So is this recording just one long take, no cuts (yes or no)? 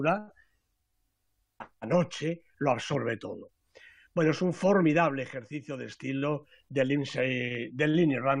no